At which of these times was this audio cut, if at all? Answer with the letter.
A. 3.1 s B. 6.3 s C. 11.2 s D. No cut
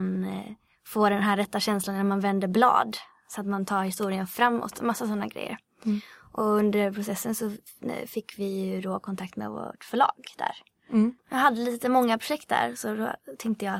C